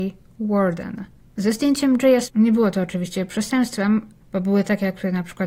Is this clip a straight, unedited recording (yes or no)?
no